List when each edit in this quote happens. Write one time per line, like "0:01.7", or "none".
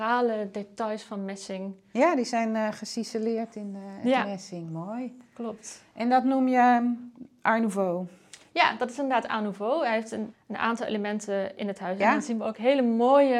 0:10.3
0:12.0